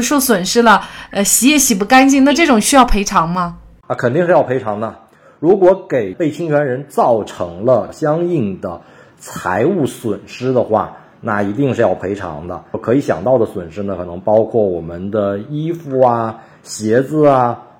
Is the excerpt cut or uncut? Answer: uncut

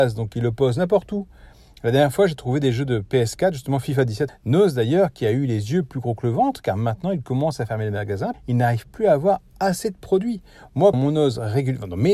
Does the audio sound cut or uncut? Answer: cut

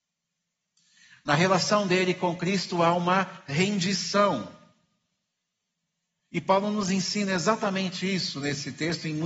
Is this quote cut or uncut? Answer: uncut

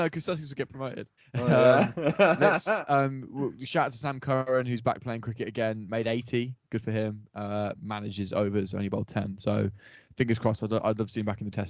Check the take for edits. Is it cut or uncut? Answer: cut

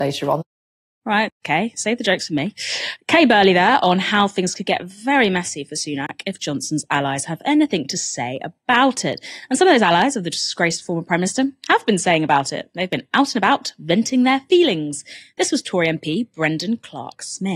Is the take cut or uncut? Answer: uncut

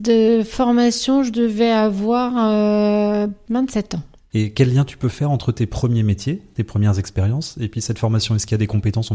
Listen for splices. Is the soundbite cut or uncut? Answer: uncut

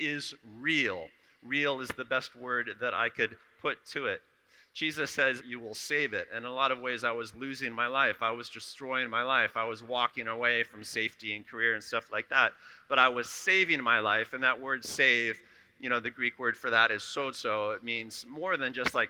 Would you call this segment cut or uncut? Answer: cut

